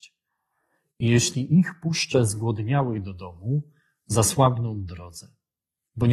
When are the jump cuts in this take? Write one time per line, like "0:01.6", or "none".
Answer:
none